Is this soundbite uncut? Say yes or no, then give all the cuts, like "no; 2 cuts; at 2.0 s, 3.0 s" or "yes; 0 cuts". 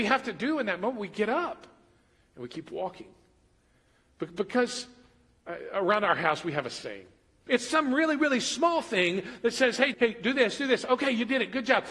no; 2 cuts; at 7.5 s, 9.9 s